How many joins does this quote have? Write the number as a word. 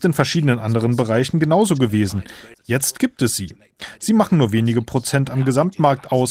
one